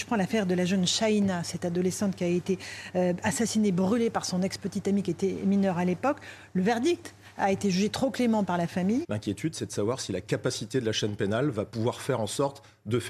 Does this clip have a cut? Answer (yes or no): yes